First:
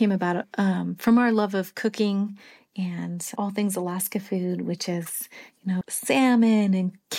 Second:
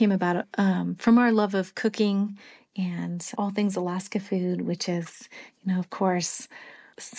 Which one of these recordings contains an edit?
first; 1 cut; at 5.8 s

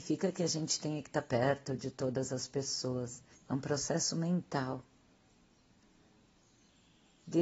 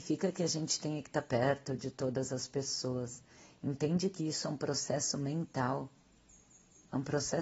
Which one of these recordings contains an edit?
first; 1 cut; at 3.3 s

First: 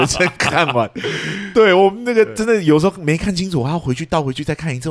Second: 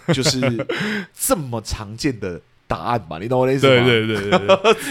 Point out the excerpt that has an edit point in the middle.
second; 1 cut; at 1.1 s

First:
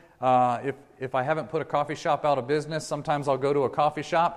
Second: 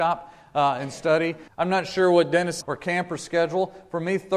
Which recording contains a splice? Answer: second; 2 cuts; at 1.5 s, 2.6 s

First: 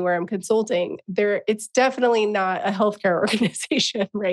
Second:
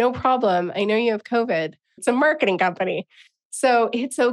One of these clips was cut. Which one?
second; 1 cut; at 2.0 s

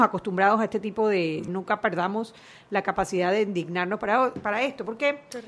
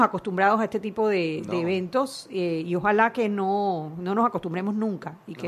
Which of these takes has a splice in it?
first; 1 cut; at 1.5 s

